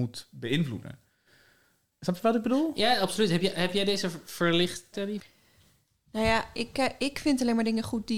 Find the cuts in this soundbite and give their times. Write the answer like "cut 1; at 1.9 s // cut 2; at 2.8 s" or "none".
cut 1; at 4.9 s